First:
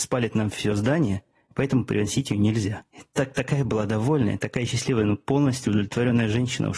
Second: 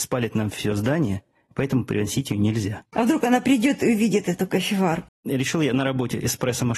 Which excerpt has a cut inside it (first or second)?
second